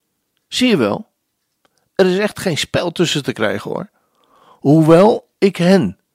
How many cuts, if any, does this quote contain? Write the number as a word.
zero